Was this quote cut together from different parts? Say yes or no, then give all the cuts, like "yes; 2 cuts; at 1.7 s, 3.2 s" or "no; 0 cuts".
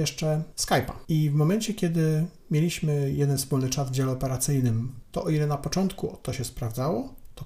yes; 2 cuts; at 1.0 s, 5.0 s